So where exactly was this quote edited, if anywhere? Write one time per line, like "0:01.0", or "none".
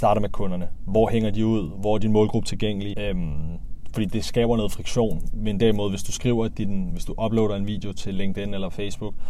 0:02.9